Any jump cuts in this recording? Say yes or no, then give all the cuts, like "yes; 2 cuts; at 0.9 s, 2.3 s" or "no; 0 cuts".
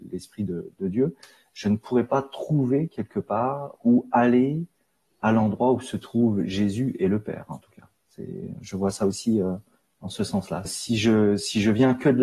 yes; 1 cut; at 10.6 s